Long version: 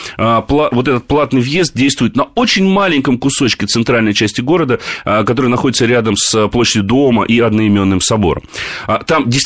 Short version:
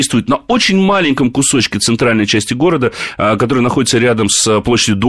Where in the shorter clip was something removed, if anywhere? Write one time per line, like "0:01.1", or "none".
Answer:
none

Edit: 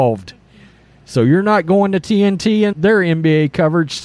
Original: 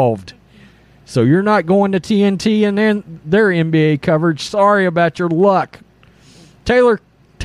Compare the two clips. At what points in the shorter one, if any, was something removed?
0:02.7

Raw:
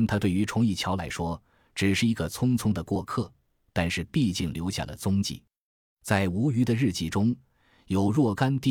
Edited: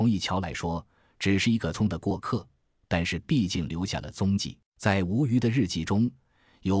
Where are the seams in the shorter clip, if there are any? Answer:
0:01.7
0:04.7

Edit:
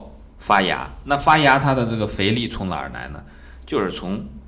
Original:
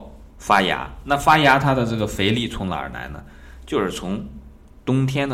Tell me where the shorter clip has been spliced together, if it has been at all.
none

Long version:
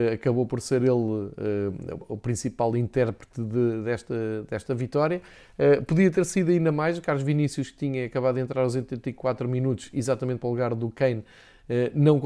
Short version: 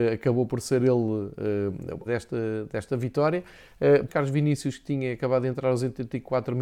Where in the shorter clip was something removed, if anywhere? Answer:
0:02.1
0:04.1

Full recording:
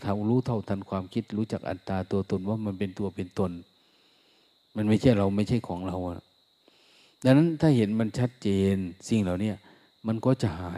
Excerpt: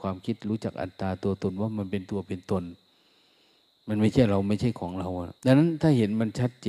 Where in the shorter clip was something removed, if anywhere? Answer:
0:05.4

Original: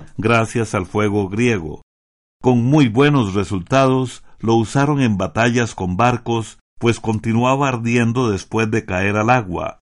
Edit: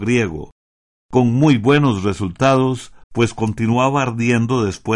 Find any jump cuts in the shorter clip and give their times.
0:03.0

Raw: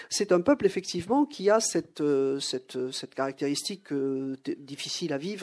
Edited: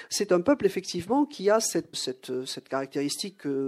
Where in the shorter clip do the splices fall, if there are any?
0:01.9

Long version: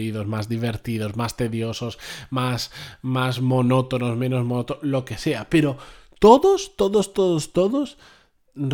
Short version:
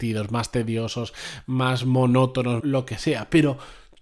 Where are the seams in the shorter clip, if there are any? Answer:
0:01.4
0:02.6

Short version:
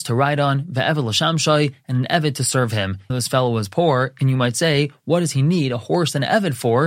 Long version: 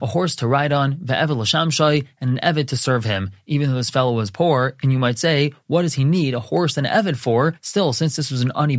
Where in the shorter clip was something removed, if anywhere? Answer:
0:03.1

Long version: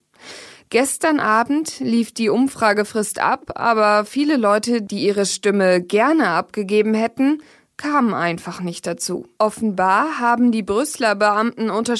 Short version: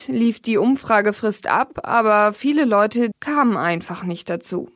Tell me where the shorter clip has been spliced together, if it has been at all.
0:03.1

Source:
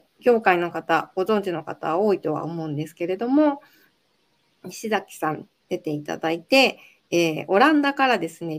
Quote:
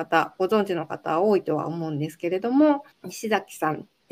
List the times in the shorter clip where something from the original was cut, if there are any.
0:02.9

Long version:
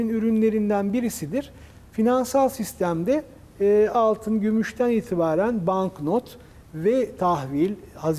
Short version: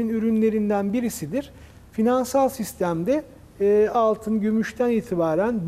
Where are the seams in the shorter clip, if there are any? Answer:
none

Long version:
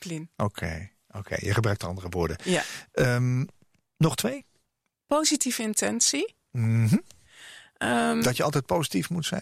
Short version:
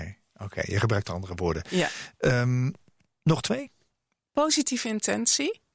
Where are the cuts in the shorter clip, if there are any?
none

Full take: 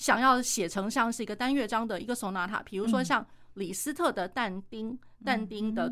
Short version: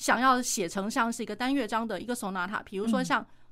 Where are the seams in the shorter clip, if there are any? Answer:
none

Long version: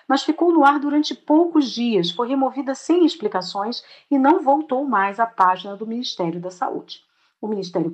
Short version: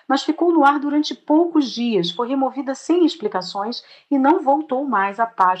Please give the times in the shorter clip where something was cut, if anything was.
none

